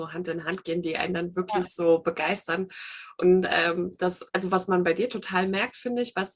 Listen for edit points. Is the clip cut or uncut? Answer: uncut